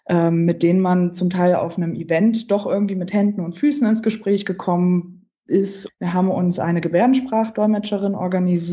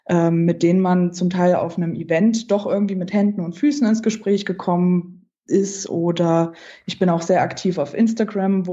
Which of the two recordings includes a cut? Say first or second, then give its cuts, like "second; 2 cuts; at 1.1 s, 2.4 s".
first; 1 cut; at 5.9 s